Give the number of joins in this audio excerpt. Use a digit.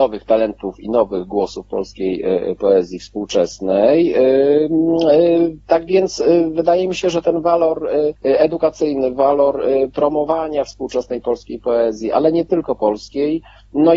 1